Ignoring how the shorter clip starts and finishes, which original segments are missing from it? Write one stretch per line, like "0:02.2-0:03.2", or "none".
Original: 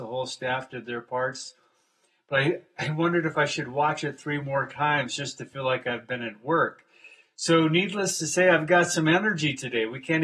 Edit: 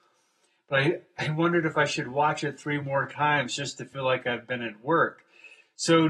none